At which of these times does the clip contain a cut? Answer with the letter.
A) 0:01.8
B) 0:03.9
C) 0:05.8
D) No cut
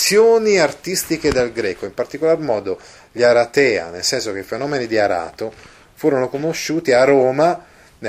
C